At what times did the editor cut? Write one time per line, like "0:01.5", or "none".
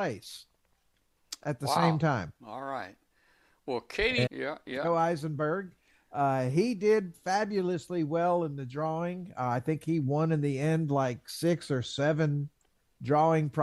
0:04.3